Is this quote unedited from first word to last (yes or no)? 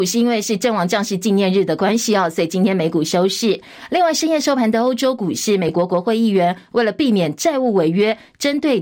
yes